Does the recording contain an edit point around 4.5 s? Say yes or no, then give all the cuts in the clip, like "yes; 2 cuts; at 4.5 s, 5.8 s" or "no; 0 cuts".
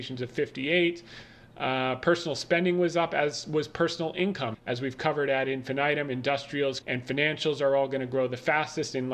yes; 2 cuts; at 4.5 s, 6.8 s